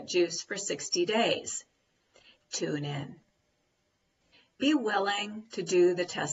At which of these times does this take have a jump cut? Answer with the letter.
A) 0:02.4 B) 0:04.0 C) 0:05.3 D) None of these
A